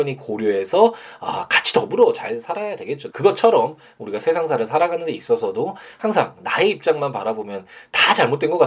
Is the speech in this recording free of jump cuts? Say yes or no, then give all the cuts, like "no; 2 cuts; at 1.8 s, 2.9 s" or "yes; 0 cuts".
no; 1 cut; at 3.1 s